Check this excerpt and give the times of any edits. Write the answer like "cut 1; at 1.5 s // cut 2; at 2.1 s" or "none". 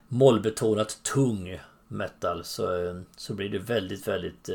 none